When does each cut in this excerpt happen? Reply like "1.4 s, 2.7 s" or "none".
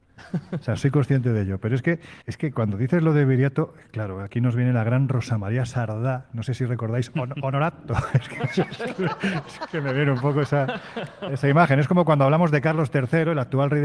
2.2 s